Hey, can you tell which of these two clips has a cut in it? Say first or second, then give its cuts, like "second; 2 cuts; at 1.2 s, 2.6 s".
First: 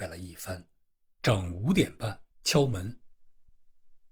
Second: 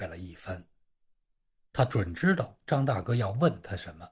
first; 2 cuts; at 1.2 s, 2.3 s